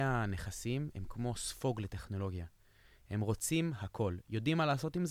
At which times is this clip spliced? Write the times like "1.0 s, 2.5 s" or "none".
none

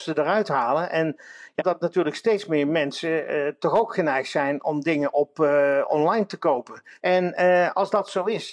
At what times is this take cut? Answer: 1.6 s, 7.0 s

